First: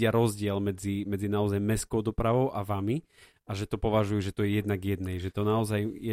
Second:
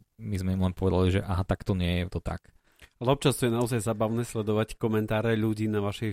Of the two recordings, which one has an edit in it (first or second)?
second